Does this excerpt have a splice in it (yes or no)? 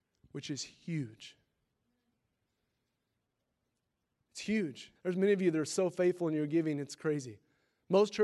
yes